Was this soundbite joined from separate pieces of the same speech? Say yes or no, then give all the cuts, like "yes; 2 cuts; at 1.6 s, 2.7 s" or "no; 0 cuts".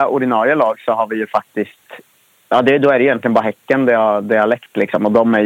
no; 0 cuts